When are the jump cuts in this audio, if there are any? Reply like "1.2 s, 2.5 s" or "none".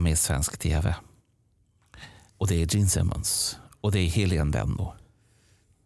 2.3 s